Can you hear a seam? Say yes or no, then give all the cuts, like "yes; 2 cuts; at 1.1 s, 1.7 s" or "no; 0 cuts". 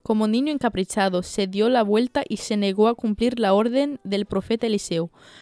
no; 0 cuts